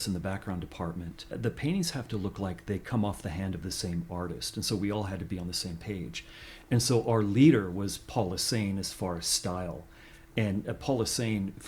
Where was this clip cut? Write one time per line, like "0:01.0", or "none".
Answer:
none